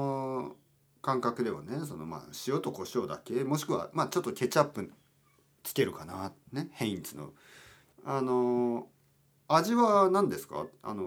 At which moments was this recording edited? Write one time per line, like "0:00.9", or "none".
0:07.9